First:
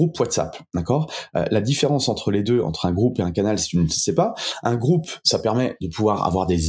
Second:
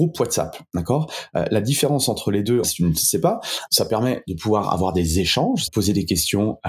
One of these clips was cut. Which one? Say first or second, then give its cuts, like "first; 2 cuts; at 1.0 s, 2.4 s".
second; 3 cuts; at 2.6 s, 3.7 s, 5.7 s